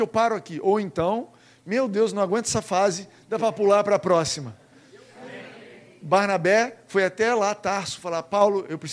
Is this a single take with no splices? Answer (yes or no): no